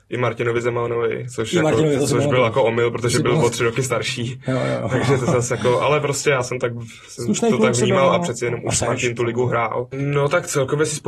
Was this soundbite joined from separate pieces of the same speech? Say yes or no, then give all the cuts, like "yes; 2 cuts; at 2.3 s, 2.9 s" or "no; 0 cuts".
yes; 1 cut; at 9.9 s